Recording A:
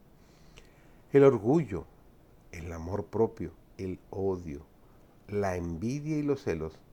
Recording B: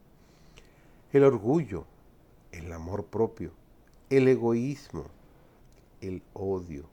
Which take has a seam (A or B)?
A